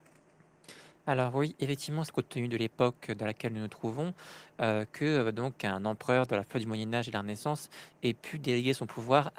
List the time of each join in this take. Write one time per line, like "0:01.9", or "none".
0:02.1